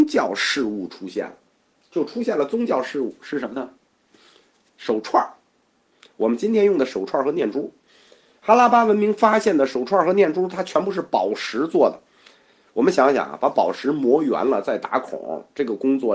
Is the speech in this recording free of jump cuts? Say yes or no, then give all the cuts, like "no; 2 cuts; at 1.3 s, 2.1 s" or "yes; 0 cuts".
yes; 0 cuts